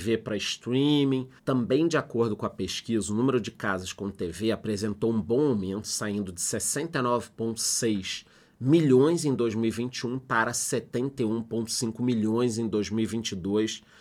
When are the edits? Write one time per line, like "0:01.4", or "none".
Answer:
0:01.4